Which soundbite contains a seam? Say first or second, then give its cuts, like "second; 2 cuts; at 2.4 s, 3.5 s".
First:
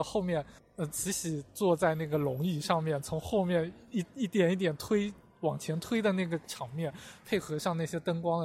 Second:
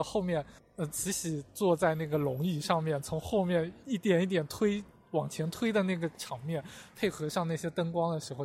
second; 1 cut; at 3.8 s